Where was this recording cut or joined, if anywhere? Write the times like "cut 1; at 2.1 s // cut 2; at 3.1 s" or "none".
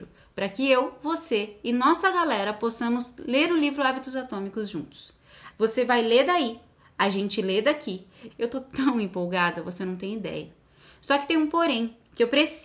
cut 1; at 5.5 s // cut 2; at 8.3 s